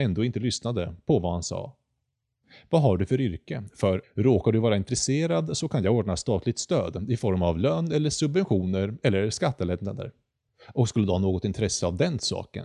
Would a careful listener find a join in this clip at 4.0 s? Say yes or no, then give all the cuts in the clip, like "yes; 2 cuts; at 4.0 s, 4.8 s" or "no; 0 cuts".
yes; 1 cut; at 4.0 s